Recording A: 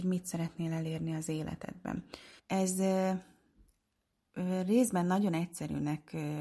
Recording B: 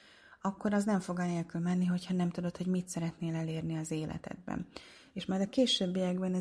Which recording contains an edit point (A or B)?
A